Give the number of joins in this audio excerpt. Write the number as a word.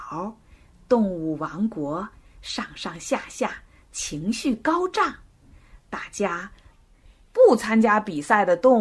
one